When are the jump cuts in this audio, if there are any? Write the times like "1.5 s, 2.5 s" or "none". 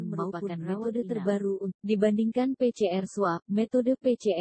1.7 s